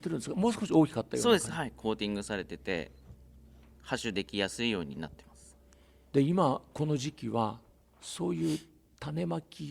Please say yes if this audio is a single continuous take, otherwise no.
yes